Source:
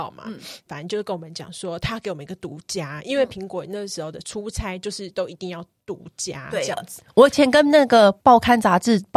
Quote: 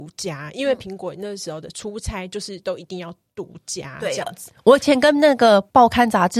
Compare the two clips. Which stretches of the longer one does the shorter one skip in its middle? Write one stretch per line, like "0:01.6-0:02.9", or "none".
none